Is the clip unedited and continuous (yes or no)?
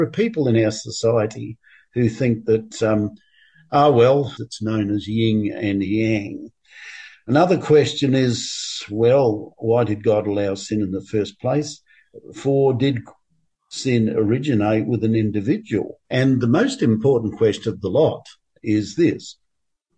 no